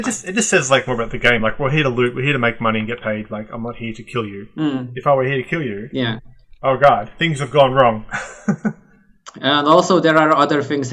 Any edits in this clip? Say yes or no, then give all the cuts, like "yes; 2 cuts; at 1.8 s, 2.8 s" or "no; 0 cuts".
no; 0 cuts